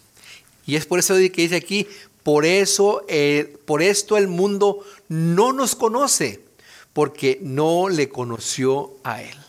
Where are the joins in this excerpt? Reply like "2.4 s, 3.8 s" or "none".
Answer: none